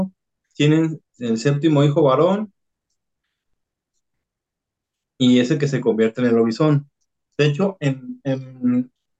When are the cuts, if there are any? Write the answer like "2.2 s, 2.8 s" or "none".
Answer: 1.1 s